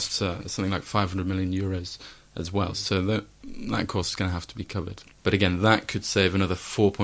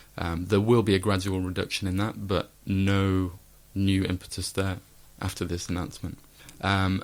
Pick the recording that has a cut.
first; 1 cut; at 5.2 s

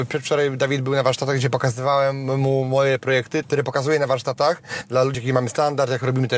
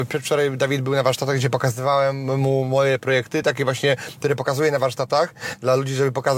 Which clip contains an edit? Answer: first; 2 cuts; at 3.4 s, 5.1 s

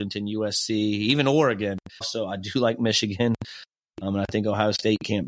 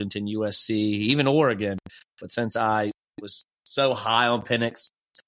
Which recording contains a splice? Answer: first; 2 cuts; at 2.0 s, 3.8 s

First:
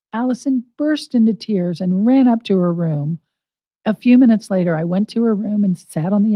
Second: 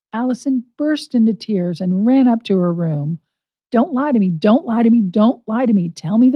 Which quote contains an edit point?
second; 1 cut; at 3.7 s

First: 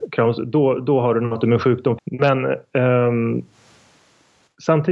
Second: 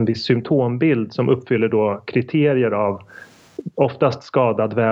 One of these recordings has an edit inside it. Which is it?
first; 1 cut; at 2.0 s

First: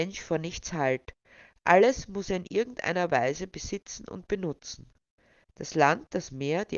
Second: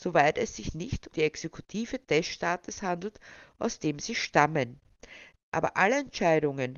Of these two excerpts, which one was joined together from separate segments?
second; 2 cuts; at 1.1 s, 5.4 s

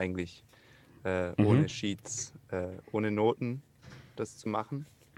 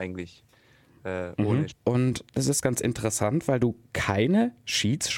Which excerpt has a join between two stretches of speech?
second; 1 cut; at 1.7 s

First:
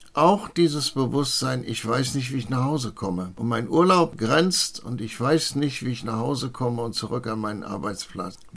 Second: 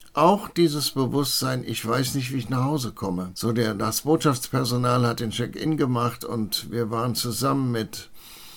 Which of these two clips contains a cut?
second; 1 cut; at 3.3 s

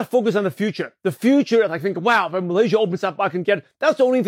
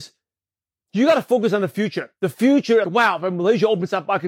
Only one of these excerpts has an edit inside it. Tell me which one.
second; 1 cut; at 2.8 s

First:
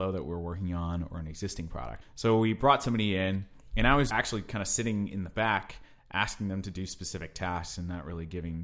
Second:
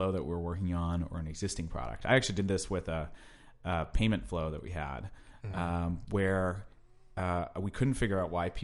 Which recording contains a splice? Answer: first; 2 cuts; at 2.0 s, 4.1 s

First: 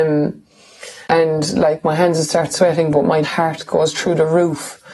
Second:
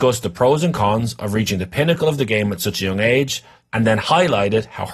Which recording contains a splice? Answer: first; 2 cuts; at 1.0 s, 3.2 s

